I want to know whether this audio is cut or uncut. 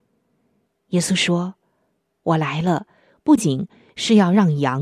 cut